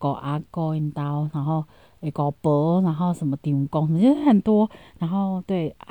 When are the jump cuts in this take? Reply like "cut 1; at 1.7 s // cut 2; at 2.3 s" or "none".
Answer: none